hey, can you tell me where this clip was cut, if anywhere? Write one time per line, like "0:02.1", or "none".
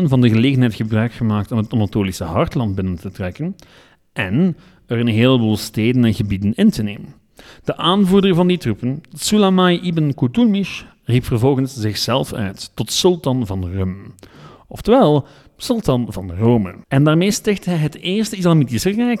0:16.8